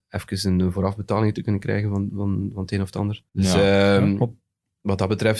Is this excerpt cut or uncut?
cut